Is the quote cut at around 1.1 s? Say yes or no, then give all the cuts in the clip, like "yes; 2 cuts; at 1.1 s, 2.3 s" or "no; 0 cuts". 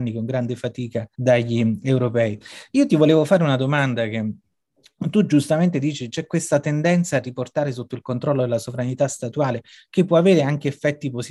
yes; 1 cut; at 1.1 s